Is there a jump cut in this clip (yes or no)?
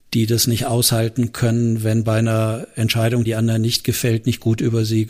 yes